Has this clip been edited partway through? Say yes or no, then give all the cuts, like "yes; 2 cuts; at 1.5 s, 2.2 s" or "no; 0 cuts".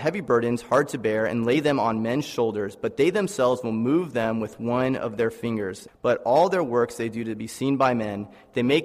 yes; 1 cut; at 5.9 s